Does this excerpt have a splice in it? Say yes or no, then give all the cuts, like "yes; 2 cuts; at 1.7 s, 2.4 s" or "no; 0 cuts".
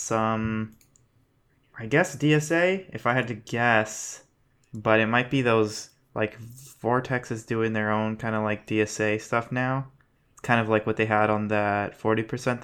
no; 0 cuts